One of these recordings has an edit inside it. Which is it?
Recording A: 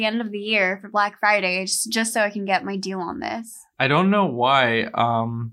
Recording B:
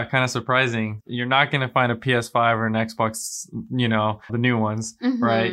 B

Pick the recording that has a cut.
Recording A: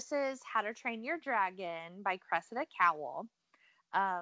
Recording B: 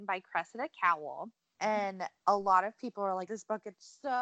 B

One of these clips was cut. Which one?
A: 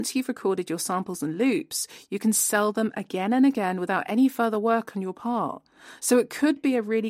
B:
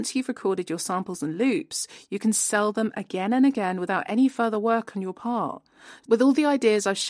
B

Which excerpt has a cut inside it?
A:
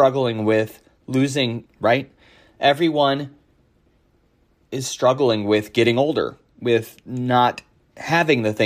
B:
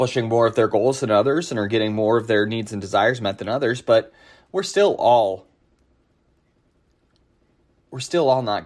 A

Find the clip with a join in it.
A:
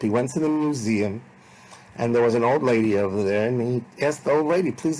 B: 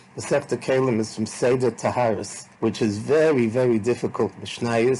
B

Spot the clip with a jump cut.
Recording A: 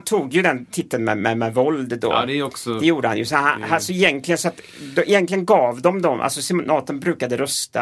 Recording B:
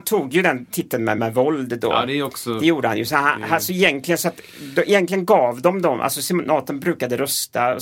B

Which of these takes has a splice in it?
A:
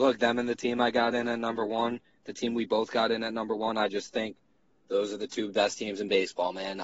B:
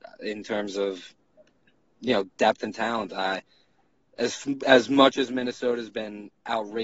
B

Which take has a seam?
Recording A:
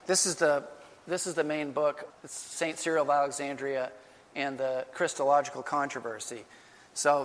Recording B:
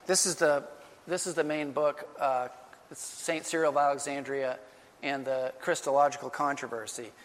A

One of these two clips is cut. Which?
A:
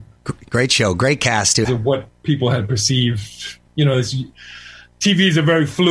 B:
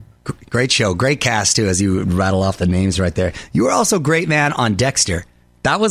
A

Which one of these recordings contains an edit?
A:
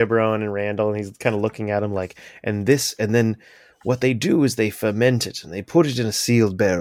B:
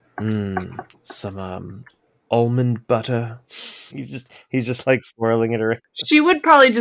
B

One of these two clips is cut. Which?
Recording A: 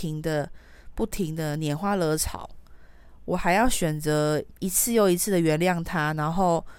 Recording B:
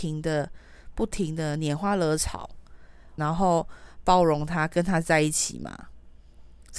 B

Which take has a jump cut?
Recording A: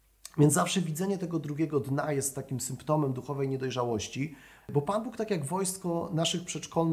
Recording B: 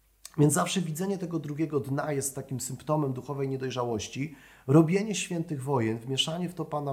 A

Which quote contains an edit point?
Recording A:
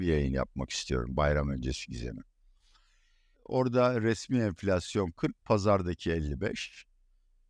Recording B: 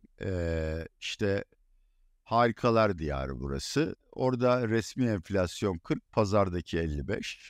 A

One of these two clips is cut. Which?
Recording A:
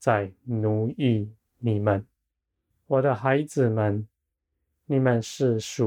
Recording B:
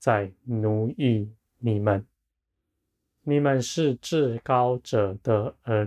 A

